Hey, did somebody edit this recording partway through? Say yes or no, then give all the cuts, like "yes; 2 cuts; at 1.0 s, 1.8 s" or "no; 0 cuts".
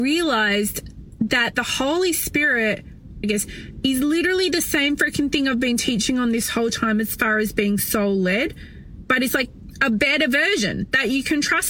yes; 2 cuts; at 3.2 s, 9.3 s